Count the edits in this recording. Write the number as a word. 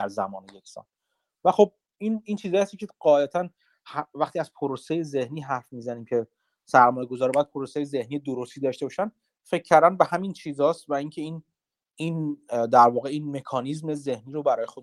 zero